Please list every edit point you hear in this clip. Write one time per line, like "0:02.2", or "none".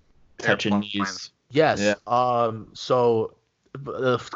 none